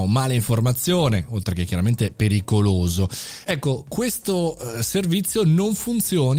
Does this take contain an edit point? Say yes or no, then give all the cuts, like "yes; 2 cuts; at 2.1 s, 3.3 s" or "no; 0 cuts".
yes; 1 cut; at 3.4 s